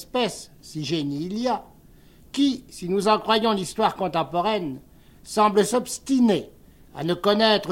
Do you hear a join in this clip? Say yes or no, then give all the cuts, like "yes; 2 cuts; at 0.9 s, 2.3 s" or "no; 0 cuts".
no; 0 cuts